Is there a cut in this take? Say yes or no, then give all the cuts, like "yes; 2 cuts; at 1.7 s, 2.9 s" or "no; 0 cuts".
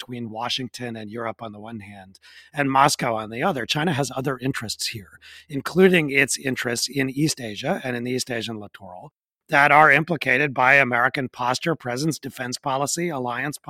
no; 0 cuts